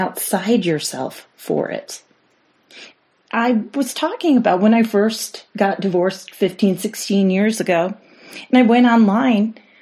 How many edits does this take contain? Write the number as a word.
one